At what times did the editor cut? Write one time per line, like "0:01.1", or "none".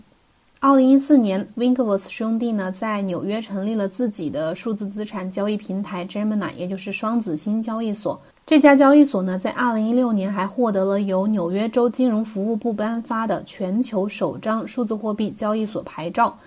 0:08.3